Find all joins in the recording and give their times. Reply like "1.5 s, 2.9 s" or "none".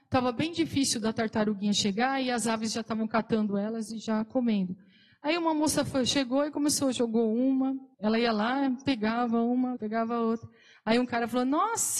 7.9 s, 9.8 s